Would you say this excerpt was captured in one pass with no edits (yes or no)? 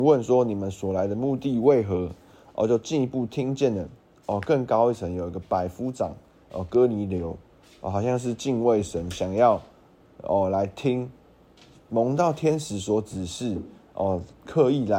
yes